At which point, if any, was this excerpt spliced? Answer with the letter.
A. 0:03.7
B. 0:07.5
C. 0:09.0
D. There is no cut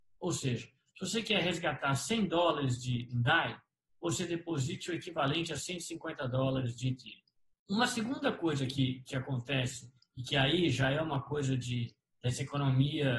B